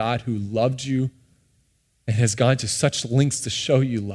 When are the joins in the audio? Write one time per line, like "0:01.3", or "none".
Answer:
0:01.9

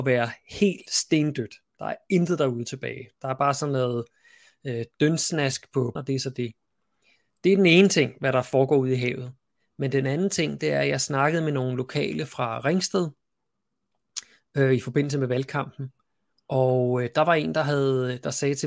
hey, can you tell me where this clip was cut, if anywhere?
0:06.0

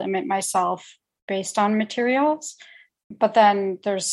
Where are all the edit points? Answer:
0:03.0

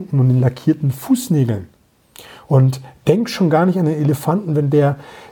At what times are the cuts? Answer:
none

